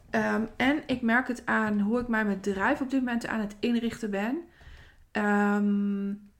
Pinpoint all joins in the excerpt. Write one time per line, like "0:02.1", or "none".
none